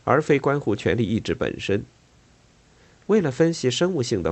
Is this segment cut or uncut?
uncut